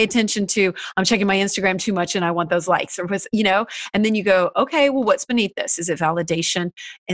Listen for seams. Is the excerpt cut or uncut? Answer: uncut